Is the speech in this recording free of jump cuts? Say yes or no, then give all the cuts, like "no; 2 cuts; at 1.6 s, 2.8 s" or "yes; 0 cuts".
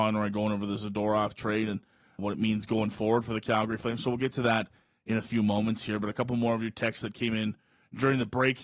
no; 1 cut; at 2.2 s